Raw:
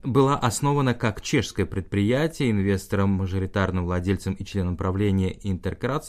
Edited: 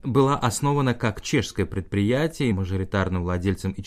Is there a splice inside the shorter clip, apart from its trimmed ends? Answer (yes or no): yes